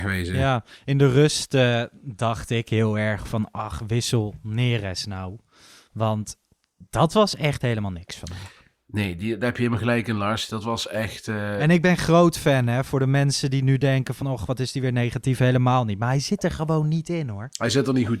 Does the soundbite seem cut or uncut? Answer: uncut